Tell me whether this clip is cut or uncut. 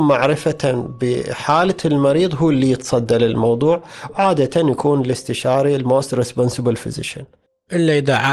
uncut